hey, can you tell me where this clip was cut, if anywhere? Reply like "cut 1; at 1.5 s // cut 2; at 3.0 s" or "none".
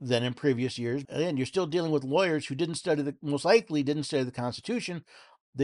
cut 1; at 1.0 s